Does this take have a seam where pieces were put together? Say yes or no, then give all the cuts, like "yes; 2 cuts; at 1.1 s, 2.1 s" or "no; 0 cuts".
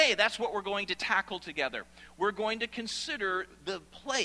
no; 0 cuts